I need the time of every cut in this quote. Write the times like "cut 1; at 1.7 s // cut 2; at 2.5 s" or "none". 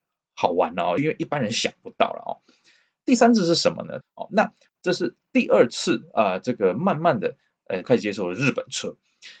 cut 1; at 1.0 s // cut 2; at 4.0 s // cut 3; at 7.8 s

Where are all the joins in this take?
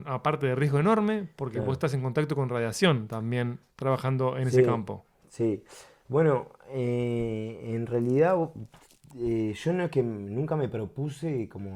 none

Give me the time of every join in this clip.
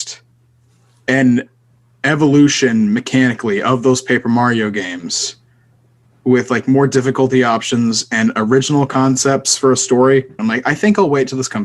cut 1; at 10.4 s

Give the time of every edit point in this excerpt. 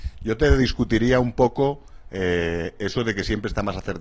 cut 1; at 2.8 s

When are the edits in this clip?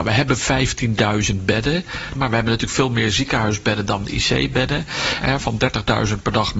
cut 1; at 2.1 s // cut 2; at 5.2 s

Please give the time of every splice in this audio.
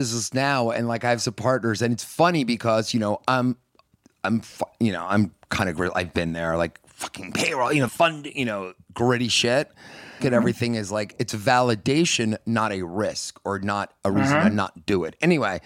cut 1; at 7.9 s // cut 2; at 10.2 s

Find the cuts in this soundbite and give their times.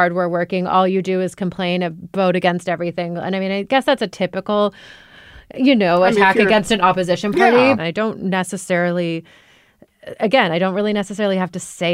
cut 1; at 7.8 s

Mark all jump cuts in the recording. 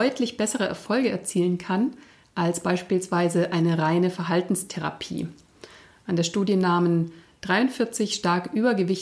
none

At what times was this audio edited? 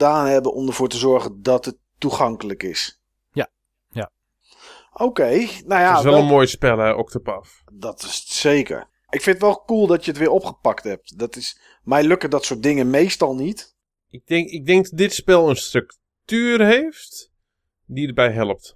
cut 1; at 9.1 s

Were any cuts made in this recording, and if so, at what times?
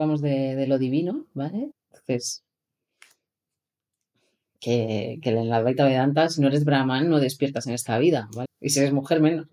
cut 1; at 1.7 s // cut 2; at 8.4 s

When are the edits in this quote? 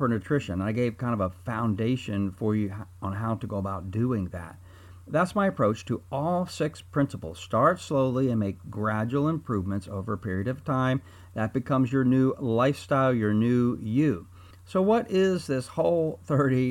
cut 1; at 14.5 s

